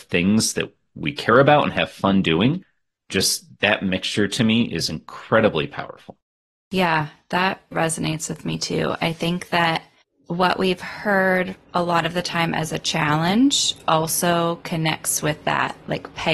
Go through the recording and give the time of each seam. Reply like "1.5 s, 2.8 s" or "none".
7.7 s